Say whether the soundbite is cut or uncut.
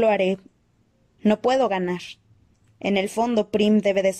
cut